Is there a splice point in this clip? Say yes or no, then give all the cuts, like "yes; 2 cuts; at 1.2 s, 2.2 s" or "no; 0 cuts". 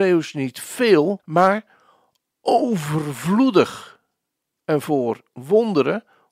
yes; 2 cuts; at 1.2 s, 4.6 s